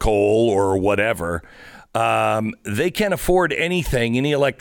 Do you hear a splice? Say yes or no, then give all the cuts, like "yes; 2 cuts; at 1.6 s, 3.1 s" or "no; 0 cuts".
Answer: no; 0 cuts